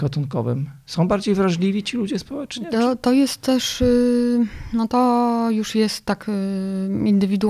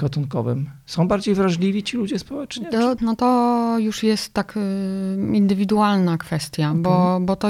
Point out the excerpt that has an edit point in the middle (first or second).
second